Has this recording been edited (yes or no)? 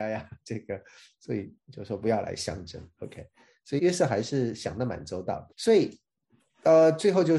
yes